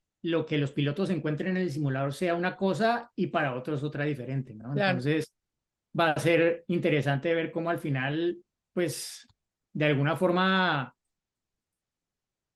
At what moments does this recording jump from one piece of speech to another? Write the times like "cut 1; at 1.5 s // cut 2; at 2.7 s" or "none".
none

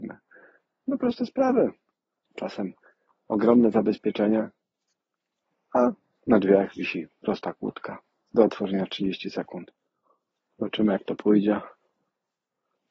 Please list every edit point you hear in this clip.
cut 1; at 2.3 s // cut 2; at 10.5 s

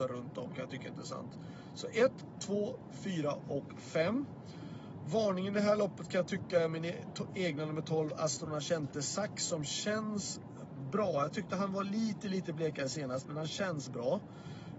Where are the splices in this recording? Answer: cut 1; at 2.9 s

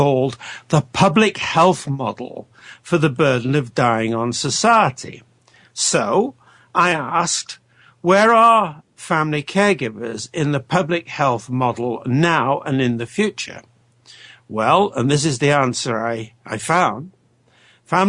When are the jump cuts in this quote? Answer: none

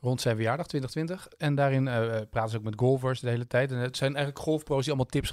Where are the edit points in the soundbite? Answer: cut 1; at 1.3 s

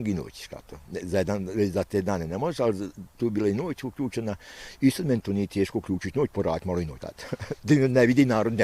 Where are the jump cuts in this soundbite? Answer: cut 1; at 7.0 s

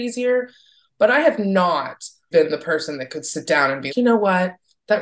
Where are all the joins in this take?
cut 1; at 2.3 s // cut 2; at 3.9 s

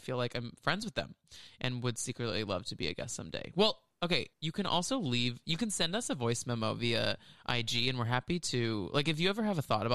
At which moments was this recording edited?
cut 1; at 4.3 s

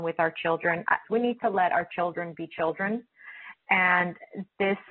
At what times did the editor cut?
cut 1; at 1.0 s

